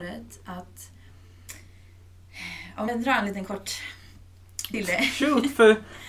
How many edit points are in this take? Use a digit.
2